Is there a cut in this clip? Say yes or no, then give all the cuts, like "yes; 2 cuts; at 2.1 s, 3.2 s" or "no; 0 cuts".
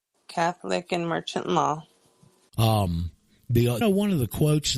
yes; 2 cuts; at 2.5 s, 3.8 s